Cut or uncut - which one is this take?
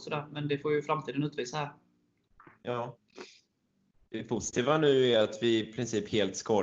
uncut